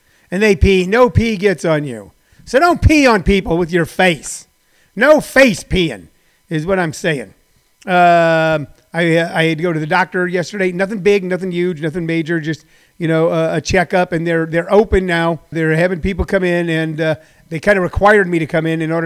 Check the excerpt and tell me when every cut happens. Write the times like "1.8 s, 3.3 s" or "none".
15.5 s